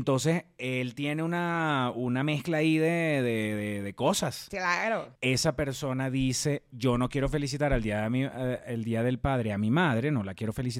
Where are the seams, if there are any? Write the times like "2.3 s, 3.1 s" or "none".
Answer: 5.1 s